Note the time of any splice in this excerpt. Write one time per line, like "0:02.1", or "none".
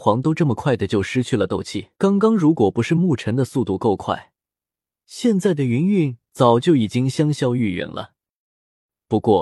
0:01.9